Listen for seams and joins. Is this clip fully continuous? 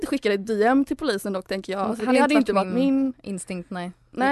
yes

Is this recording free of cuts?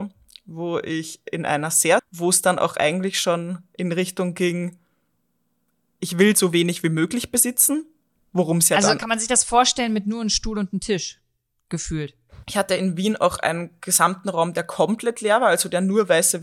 no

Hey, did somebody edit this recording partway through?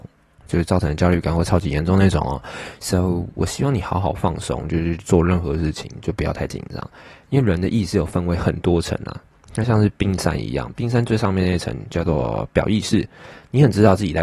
no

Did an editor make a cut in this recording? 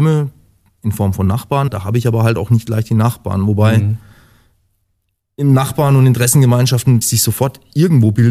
yes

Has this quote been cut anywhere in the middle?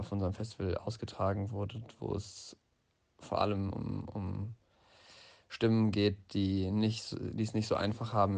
no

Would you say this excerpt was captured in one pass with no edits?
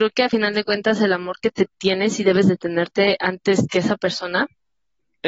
yes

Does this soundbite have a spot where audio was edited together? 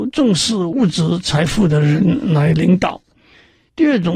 no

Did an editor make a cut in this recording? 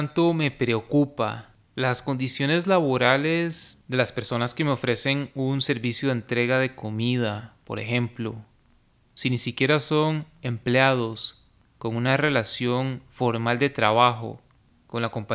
no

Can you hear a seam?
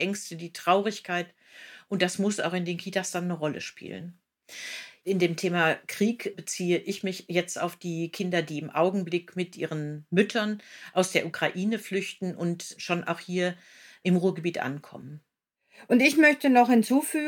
no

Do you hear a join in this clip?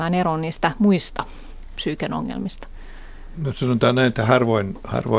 no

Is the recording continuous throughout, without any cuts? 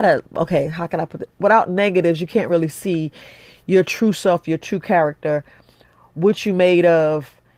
yes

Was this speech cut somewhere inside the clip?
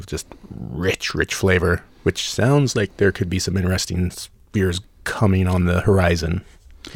no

